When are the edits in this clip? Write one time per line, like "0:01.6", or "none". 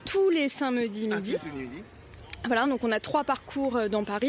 none